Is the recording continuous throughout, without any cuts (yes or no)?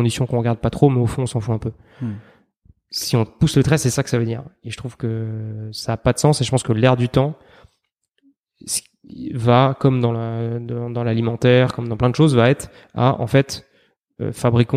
yes